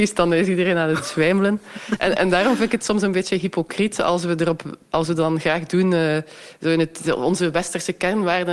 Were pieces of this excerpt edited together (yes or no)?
no